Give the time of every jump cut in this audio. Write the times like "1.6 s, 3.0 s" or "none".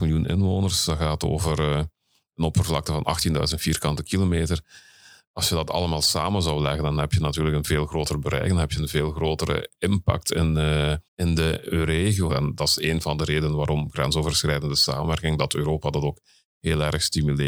11.1 s, 12.3 s